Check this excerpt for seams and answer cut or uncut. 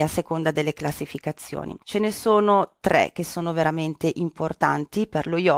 cut